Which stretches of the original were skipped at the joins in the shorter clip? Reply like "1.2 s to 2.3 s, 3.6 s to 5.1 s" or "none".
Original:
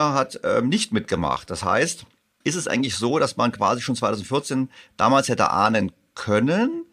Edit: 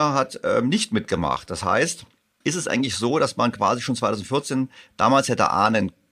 none